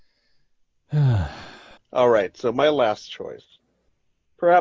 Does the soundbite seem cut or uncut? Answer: cut